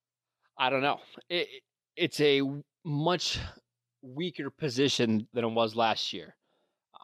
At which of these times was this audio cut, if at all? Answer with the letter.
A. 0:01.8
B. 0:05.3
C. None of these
B